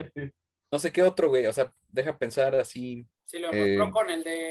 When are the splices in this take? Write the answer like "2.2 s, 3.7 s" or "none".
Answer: 3.2 s